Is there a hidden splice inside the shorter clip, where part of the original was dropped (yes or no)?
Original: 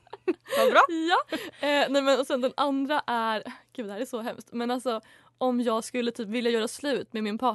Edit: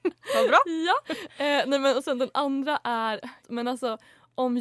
yes